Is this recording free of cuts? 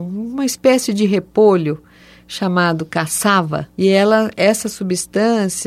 no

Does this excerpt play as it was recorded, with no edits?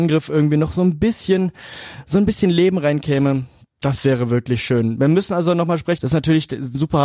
no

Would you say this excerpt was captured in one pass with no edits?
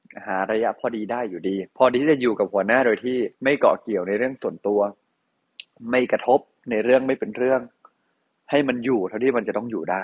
no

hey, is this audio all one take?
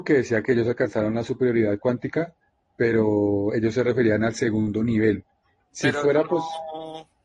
no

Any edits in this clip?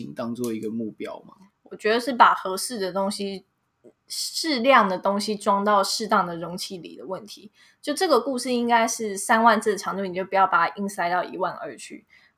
no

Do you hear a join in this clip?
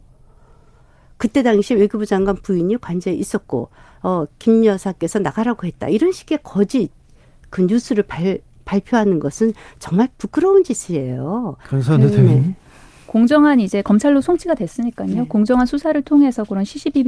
yes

